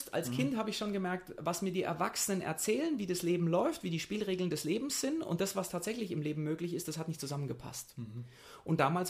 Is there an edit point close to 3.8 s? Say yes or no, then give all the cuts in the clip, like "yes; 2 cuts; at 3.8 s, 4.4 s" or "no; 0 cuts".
no; 0 cuts